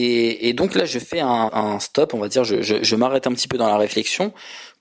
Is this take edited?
no; 0 cuts

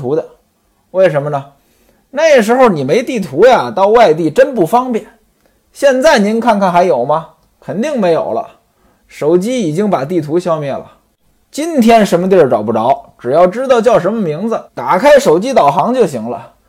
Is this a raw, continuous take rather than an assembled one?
no; 2 cuts; at 11.4 s, 14.7 s

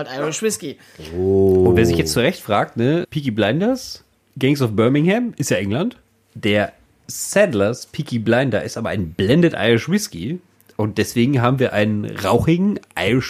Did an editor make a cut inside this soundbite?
no; 0 cuts

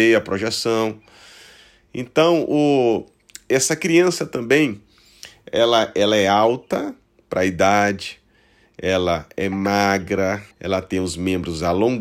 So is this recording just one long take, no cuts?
no; 1 cut; at 10.5 s

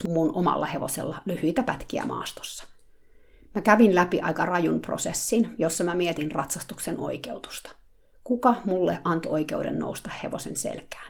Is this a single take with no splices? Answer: yes; 0 cuts

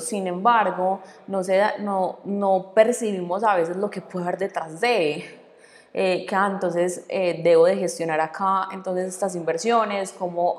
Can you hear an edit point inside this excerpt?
no; 0 cuts

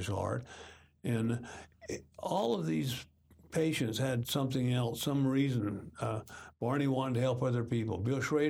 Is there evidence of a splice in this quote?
no; 0 cuts

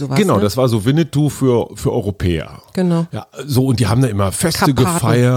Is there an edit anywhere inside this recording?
no; 0 cuts

